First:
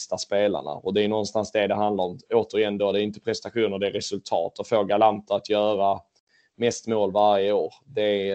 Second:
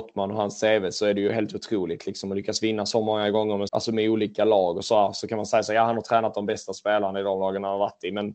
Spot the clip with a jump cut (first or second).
second